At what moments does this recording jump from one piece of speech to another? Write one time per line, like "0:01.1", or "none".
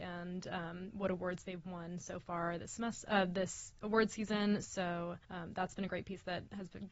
0:05.2